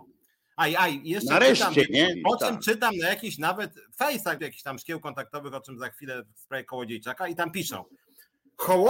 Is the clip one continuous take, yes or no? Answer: no